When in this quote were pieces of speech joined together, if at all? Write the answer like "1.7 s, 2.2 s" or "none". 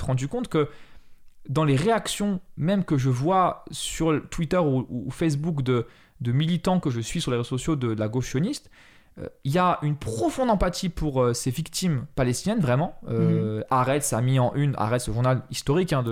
none